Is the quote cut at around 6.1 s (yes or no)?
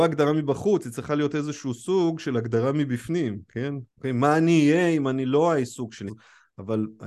yes